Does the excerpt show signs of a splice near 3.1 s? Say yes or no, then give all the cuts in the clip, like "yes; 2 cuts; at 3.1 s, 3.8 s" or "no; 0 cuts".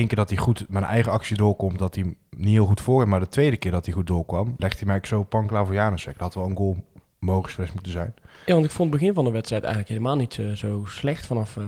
no; 1 cut; at 4.6 s